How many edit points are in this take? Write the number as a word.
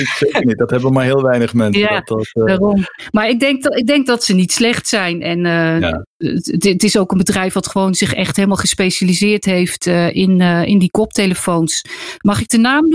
zero